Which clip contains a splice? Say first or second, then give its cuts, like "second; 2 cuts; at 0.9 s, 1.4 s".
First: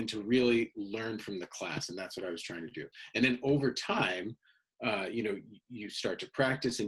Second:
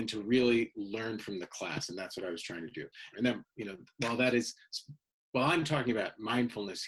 second; 1 cut; at 3.1 s